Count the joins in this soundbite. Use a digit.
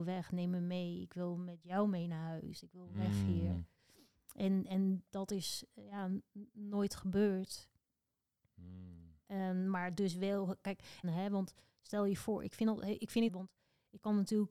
2